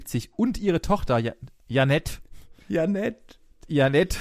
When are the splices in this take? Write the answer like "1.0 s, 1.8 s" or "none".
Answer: 2.6 s